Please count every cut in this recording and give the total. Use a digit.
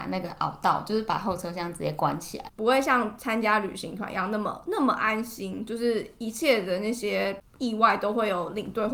1